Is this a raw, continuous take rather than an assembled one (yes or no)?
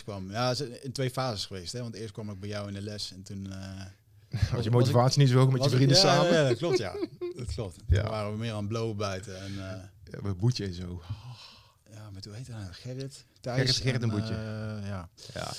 yes